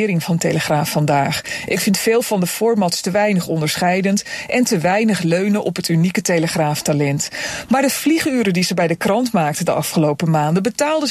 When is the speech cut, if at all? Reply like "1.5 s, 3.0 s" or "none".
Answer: none